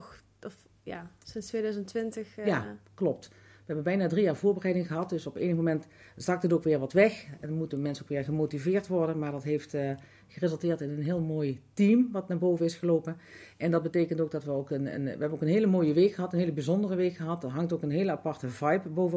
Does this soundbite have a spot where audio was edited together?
no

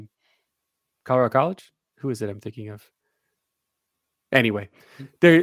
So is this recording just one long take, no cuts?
yes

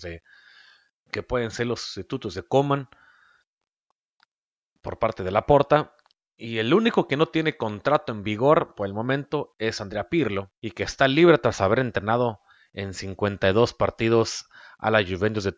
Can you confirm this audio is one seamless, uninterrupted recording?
no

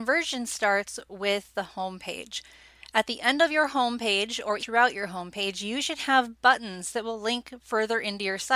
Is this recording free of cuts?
no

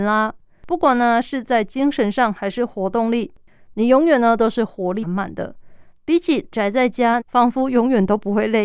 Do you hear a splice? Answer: yes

